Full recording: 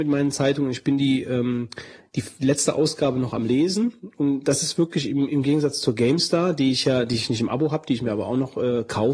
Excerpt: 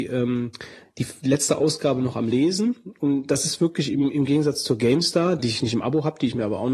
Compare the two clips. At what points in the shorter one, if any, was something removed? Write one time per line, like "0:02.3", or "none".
0:05.4